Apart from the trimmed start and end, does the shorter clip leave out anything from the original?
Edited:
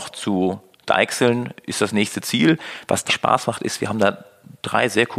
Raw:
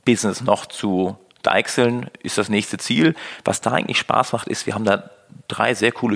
yes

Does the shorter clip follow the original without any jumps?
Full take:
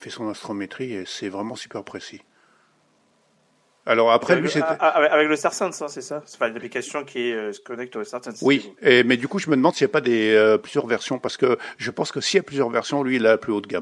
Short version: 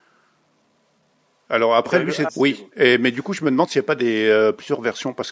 no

